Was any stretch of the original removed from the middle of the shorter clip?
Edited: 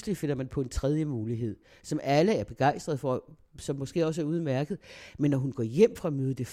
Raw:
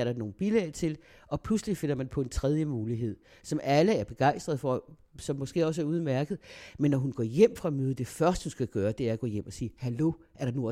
no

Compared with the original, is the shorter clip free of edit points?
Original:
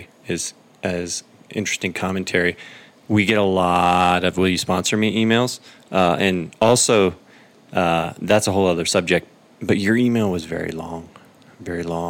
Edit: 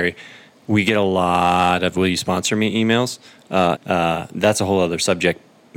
no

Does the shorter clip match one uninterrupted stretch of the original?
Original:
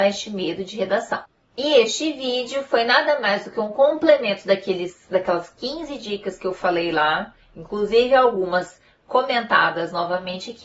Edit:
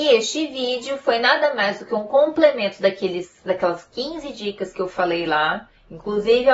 yes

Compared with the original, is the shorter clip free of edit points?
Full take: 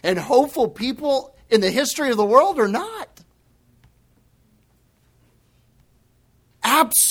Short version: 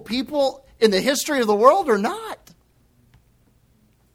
yes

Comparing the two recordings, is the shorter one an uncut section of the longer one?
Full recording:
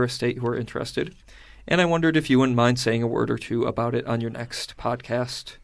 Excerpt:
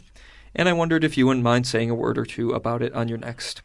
yes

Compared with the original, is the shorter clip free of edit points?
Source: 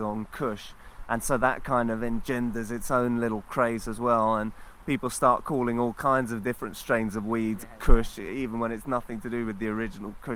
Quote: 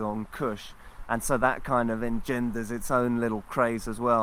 yes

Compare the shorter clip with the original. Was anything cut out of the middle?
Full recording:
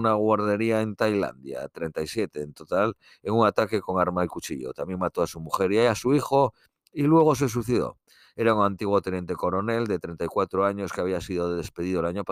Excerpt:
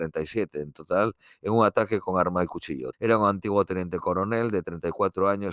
yes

